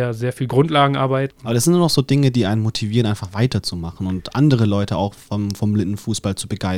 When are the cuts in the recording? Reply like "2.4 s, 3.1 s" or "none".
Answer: 1.3 s